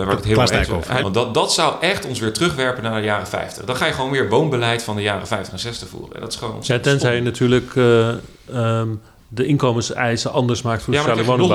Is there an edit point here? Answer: yes; 1 cut; at 1.0 s

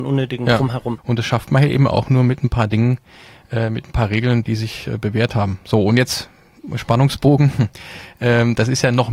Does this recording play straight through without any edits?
no; 2 cuts; at 1.0 s, 4.4 s

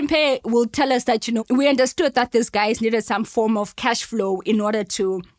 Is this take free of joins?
no; 1 cut; at 1.4 s

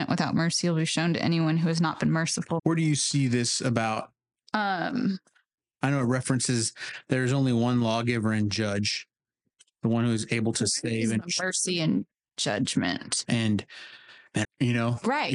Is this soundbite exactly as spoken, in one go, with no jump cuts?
no; 3 cuts; at 2.6 s, 13.2 s, 14.4 s

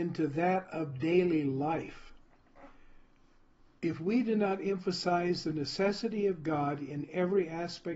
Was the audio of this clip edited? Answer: no; 0 cuts

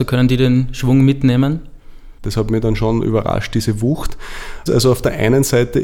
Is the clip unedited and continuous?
no; 2 cuts; at 2.2 s, 4.7 s

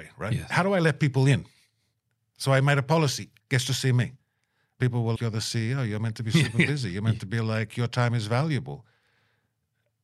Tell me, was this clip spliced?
yes; 2 cuts; at 3.4 s, 5.2 s

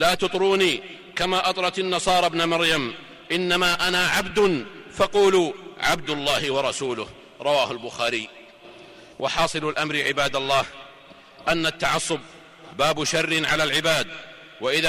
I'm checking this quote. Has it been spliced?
yes; 1 cut; at 9.1 s

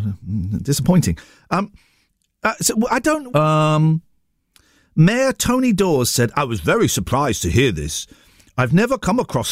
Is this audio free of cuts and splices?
no; 1 cut; at 3.3 s

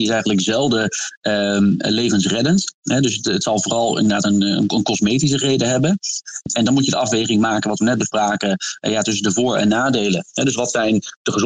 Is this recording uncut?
yes; 0 cuts

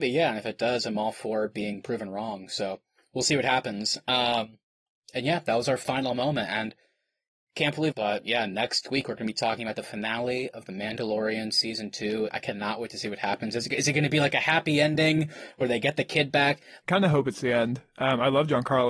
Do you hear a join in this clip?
yes; 3 cuts; at 7.9 s, 12.3 s, 16.8 s

